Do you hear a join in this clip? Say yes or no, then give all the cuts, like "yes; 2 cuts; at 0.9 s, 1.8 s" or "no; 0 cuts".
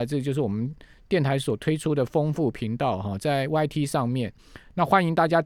no; 0 cuts